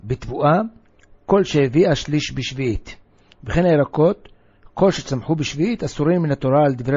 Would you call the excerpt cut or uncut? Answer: uncut